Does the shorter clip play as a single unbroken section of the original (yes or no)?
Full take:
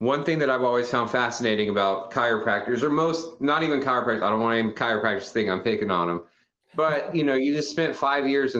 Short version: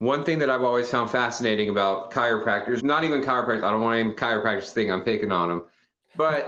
no